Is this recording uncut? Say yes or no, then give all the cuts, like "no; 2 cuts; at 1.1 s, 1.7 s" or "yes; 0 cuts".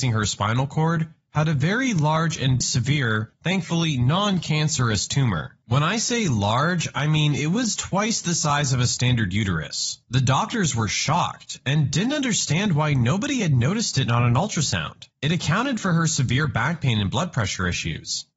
no; 1 cut; at 2.6 s